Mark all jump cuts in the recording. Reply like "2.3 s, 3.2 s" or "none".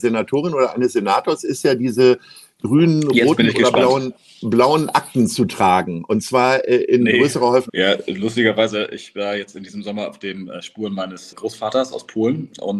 7.7 s, 11.3 s